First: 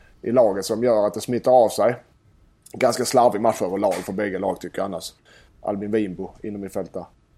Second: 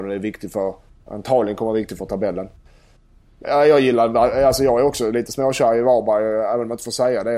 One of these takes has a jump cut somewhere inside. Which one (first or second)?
first